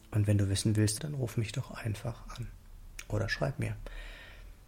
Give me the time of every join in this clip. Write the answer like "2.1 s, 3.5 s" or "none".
1.0 s